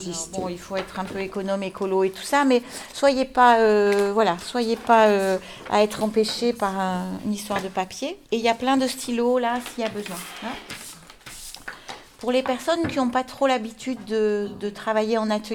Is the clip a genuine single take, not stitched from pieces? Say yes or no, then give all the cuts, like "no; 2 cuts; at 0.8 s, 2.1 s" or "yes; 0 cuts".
no; 1 cut; at 8.2 s